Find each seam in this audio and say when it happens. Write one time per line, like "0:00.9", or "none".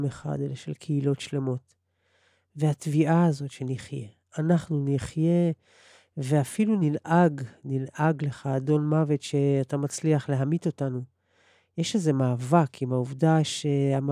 none